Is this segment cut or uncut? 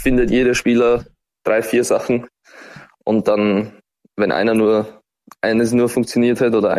uncut